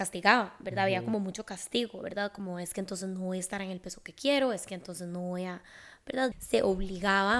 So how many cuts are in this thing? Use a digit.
1